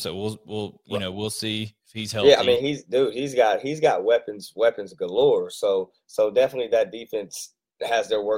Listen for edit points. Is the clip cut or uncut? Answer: uncut